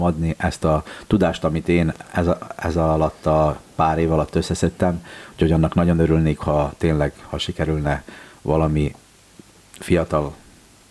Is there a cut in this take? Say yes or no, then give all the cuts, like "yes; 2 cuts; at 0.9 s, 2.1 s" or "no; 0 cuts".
no; 0 cuts